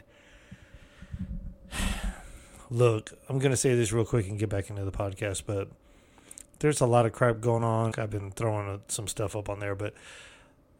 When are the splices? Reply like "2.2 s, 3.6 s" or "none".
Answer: 7.9 s